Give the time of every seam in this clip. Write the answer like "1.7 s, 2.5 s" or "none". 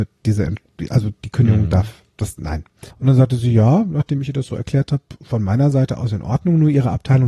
2.9 s